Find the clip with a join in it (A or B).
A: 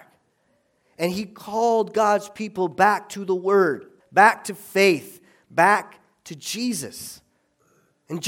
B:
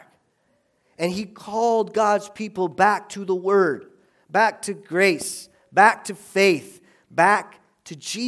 A